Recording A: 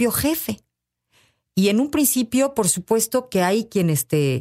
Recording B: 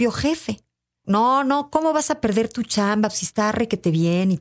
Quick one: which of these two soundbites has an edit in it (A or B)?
B